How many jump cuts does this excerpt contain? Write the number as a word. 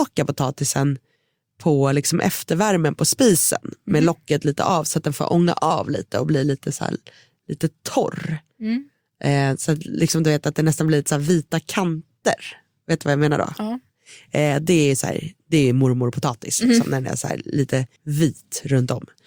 one